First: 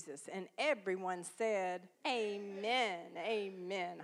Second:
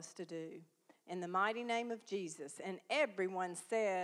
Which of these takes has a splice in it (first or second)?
first